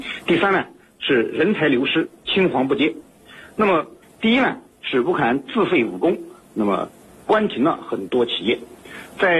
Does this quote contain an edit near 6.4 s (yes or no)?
no